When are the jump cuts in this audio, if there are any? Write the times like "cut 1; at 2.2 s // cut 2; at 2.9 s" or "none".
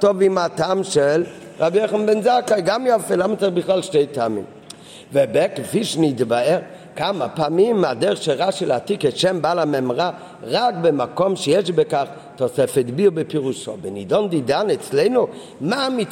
none